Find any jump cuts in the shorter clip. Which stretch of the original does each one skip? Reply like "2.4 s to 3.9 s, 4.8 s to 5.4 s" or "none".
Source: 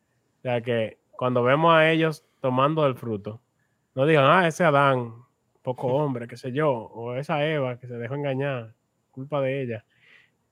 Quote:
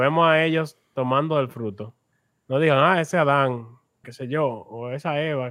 5.5 s to 6.3 s